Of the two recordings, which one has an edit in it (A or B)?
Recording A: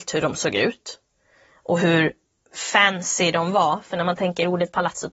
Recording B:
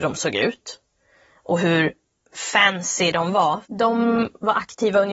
B